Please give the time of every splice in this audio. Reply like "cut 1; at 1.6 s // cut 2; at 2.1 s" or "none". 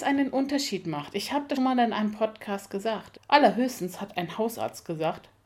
cut 1; at 1.6 s // cut 2; at 3.2 s